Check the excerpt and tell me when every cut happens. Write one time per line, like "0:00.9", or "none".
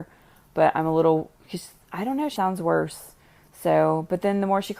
0:02.4